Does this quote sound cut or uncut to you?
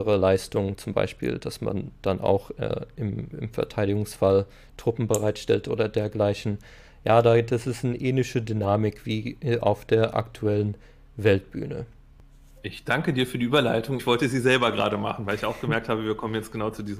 cut